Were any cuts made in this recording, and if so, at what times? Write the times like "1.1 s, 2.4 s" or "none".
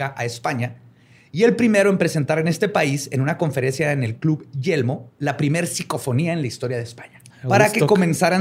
7.3 s